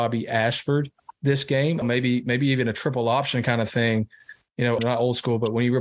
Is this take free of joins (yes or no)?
no